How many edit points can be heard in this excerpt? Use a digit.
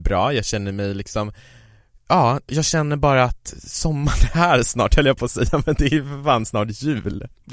1